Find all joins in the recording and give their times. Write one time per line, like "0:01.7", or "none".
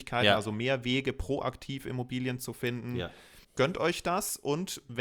0:03.4